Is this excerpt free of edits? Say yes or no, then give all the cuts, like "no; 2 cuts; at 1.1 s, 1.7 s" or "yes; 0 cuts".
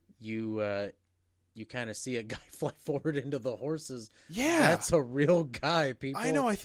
yes; 0 cuts